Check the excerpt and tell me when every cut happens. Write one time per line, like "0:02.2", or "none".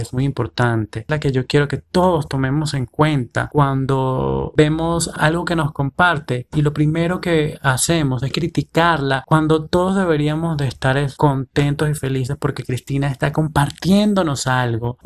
none